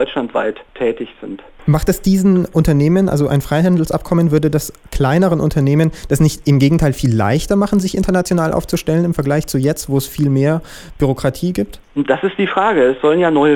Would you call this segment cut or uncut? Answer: uncut